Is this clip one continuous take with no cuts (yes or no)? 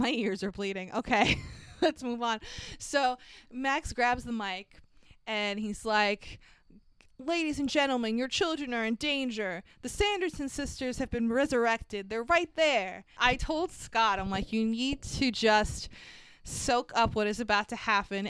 no